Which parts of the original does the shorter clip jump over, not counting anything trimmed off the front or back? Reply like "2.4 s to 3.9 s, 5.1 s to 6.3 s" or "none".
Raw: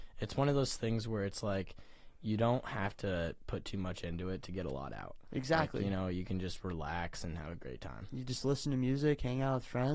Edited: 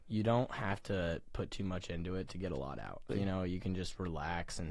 5.2 s to 5.7 s